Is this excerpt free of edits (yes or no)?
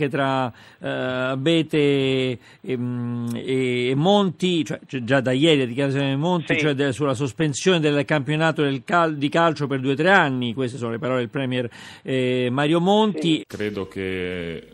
no